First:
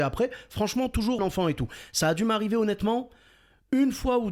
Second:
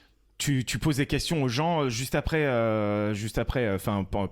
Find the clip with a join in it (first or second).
first